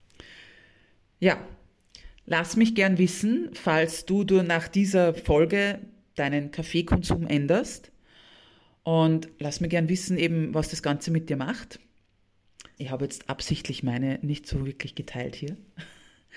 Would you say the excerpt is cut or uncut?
cut